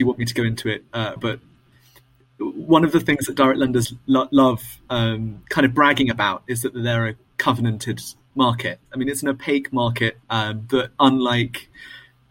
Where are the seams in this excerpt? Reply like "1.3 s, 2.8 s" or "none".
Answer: 1.2 s, 8.9 s, 10.2 s